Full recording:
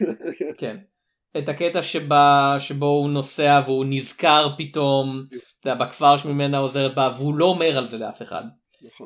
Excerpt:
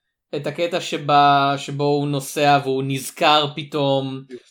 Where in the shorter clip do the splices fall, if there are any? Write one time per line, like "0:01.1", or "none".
none